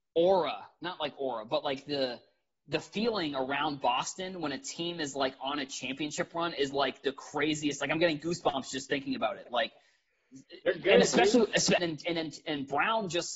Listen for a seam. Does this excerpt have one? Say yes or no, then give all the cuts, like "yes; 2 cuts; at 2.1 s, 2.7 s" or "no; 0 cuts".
yes; 1 cut; at 11.8 s